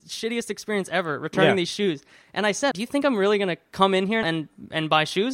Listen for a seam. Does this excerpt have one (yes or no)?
yes